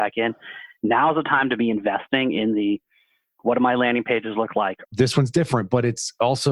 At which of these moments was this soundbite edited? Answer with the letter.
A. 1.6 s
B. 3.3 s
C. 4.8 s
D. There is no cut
C